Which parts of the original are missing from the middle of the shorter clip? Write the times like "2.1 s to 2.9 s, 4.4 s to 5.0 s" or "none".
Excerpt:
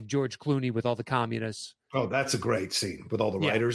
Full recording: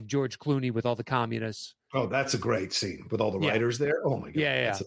none